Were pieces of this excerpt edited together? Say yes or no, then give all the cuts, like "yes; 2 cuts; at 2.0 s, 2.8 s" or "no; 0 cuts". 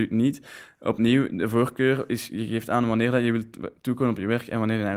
no; 0 cuts